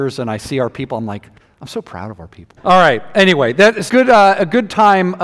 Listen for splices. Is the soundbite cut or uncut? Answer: cut